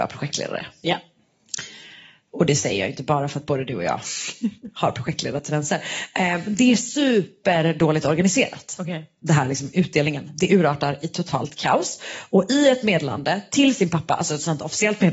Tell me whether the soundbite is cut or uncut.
uncut